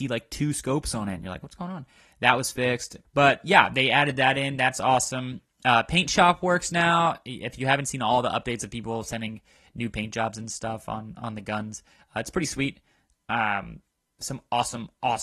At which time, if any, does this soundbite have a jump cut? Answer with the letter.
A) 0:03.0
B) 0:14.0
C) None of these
A